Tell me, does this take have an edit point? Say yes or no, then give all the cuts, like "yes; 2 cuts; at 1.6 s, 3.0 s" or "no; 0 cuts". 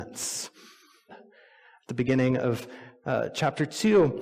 yes; 1 cut; at 1.1 s